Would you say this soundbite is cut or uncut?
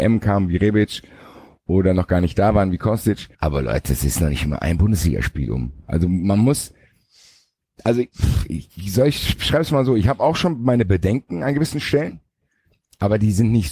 cut